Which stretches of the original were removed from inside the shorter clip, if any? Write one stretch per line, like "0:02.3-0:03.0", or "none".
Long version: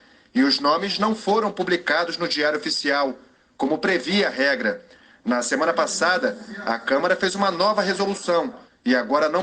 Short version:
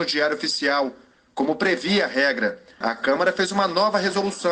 0:05.0-0:06.6